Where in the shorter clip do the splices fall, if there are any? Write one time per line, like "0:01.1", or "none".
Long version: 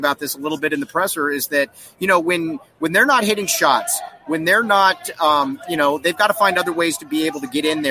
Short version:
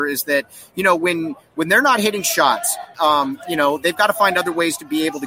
0:02.9

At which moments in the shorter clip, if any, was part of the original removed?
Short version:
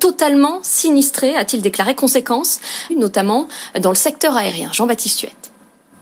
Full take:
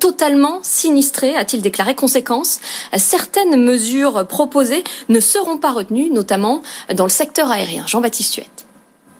0:02.9

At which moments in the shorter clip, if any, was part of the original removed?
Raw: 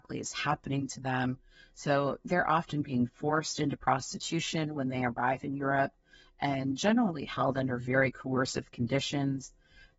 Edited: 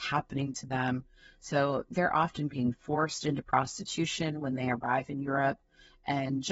none

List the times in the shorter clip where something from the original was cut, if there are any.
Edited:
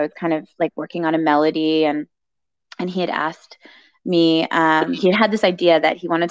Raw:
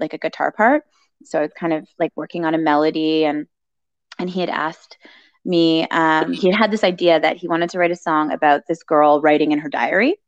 none

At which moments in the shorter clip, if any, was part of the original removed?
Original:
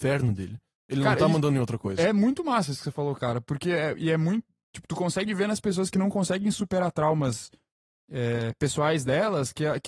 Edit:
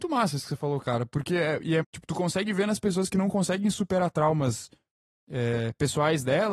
0:01.8

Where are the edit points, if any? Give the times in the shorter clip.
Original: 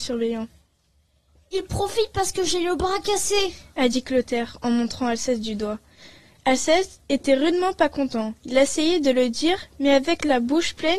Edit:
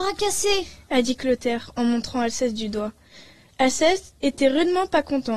none

